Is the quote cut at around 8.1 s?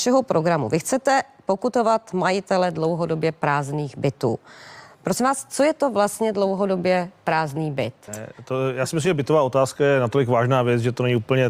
yes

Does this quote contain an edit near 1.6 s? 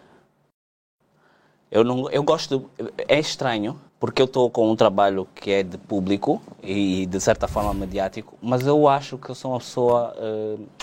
no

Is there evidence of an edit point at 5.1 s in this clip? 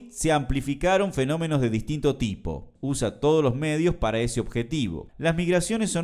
yes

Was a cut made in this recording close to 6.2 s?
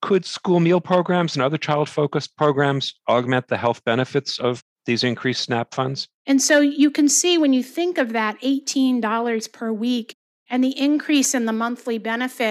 yes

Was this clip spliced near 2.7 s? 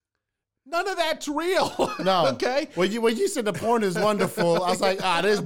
no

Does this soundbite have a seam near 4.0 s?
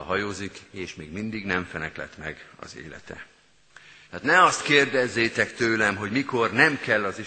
yes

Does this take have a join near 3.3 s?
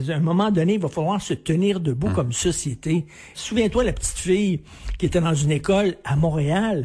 yes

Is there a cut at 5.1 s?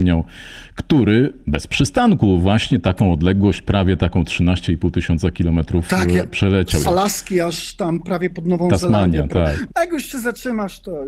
no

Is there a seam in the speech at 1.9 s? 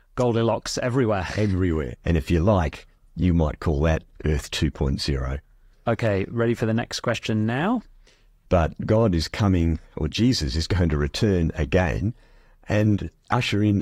yes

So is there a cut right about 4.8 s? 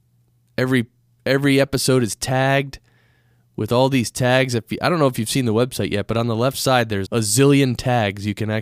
no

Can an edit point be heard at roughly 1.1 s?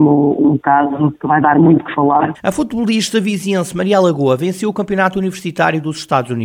yes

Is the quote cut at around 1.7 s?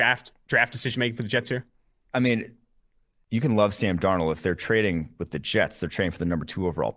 no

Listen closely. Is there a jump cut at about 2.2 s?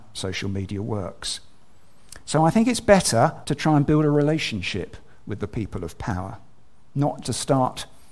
no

